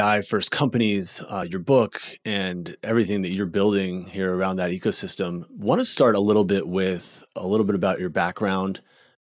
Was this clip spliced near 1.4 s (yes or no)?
no